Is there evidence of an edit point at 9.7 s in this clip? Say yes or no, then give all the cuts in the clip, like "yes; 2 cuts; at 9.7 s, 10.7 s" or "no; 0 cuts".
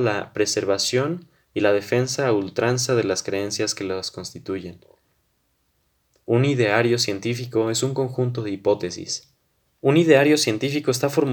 yes; 1 cut; at 9.7 s